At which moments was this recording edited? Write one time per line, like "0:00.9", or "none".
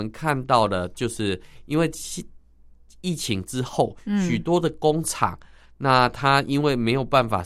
none

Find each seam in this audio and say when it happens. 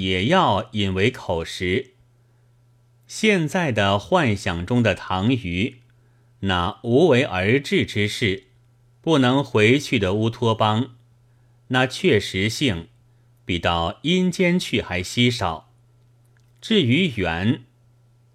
none

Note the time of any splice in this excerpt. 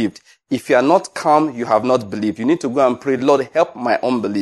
none

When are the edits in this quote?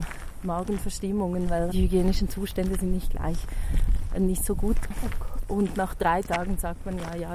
0:01.7
0:04.9

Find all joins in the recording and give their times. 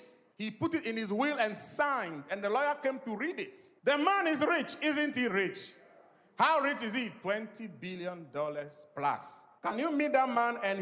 none

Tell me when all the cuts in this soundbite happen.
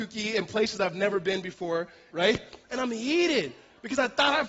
0:02.1

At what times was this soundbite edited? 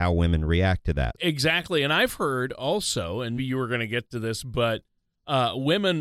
0:01.2
0:03.4

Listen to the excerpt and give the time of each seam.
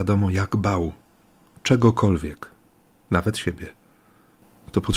none

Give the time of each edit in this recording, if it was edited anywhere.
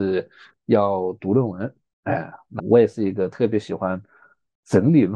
0:02.6

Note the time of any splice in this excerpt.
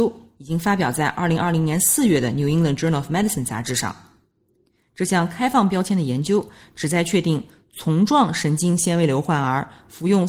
none

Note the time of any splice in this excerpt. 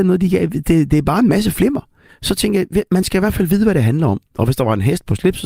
0:02.1
0:04.3

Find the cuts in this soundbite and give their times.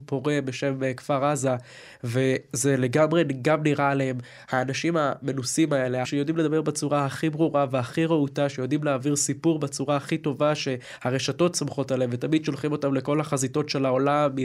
0:06.0

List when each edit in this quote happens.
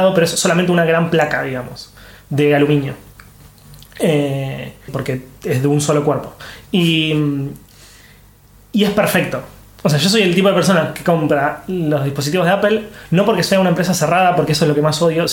0:04.9

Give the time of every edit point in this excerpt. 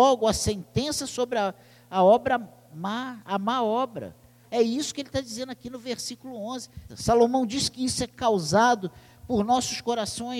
0:04.4
0:06.9

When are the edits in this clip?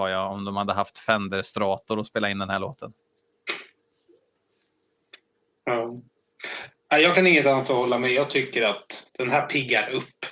0:09.1

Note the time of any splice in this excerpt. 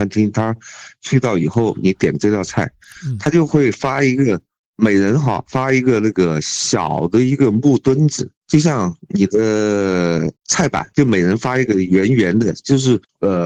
none

